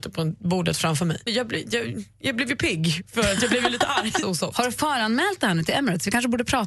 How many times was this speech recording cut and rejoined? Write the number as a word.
two